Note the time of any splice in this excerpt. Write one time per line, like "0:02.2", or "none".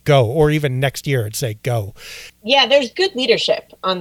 0:02.3